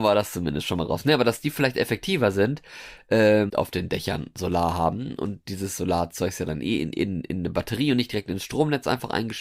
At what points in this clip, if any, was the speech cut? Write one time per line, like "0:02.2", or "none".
0:03.5